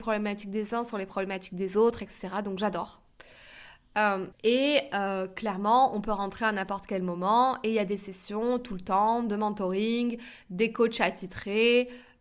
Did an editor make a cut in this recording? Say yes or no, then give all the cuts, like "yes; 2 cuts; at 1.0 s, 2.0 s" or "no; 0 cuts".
yes; 1 cut; at 4.3 s